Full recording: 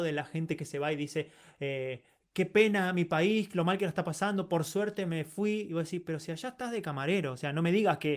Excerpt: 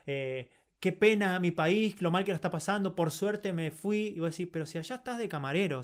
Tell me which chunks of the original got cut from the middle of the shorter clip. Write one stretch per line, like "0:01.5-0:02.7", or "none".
none

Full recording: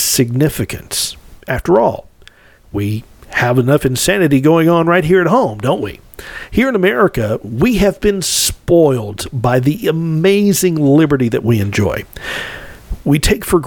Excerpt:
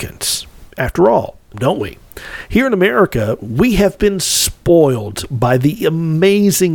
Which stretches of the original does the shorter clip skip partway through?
0:02.2-0:05.6

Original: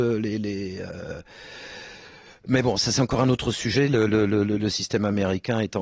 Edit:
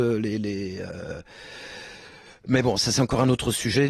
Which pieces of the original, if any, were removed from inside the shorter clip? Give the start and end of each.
none

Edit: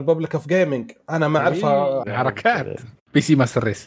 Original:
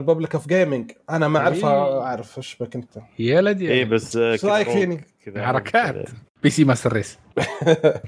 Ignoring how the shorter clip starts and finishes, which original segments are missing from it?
0:02.0-0:05.3

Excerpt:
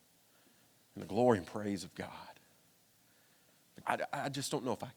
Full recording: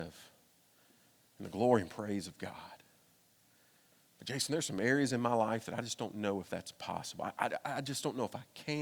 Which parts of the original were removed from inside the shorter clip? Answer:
0:04.2-0:07.3

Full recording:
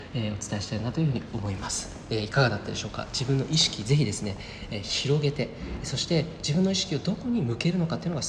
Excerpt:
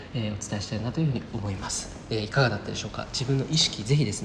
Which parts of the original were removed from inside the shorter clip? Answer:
none

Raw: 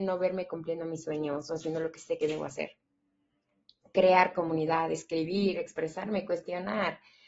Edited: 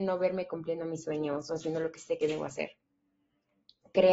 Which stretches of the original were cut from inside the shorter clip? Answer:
none

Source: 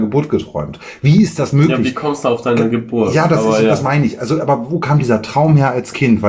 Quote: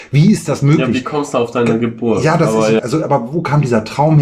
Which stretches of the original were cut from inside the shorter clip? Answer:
0:03.7-0:04.2

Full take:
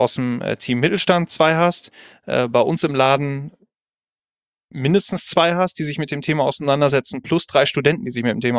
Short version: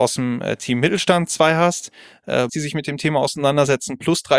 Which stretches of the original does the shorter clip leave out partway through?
0:02.5-0:05.7

